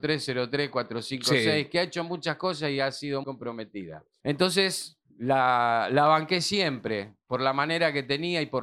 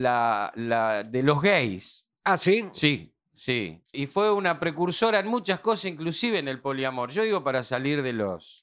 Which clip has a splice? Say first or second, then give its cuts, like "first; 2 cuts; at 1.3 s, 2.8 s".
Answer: first; 2 cuts; at 3.2 s, 5.1 s